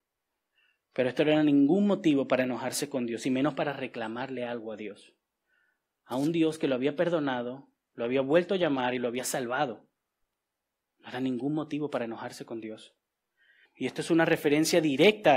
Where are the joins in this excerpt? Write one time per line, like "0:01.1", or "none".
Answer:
0:13.7